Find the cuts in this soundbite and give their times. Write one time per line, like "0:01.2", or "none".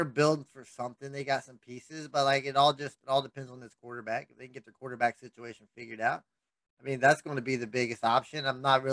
none